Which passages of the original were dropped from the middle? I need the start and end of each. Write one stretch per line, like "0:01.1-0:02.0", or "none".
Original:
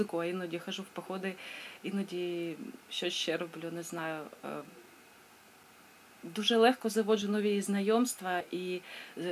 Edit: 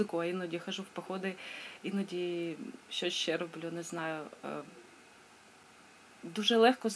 none